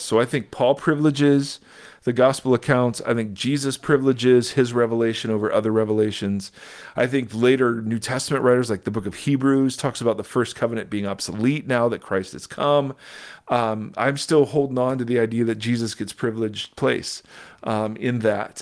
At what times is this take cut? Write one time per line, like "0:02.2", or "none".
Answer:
0:13.4